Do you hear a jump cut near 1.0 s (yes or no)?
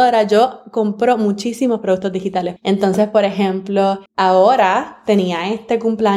no